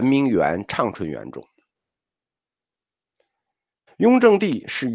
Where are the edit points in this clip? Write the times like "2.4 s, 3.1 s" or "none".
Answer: 3.9 s